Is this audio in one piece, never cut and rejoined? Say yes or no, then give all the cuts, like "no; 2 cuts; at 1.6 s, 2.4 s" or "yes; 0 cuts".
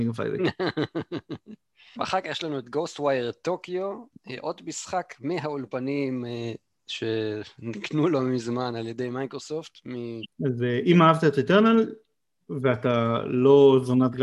no; 2 cuts; at 2.0 s, 10.2 s